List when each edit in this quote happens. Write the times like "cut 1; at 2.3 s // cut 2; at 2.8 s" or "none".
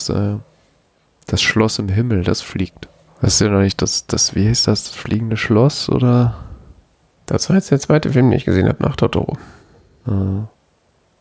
cut 1; at 3.1 s